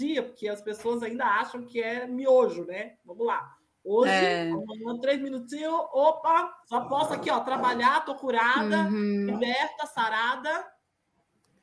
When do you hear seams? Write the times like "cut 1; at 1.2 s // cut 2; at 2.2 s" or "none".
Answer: cut 1; at 6.6 s